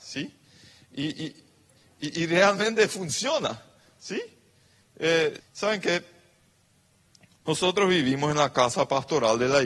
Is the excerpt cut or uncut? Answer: cut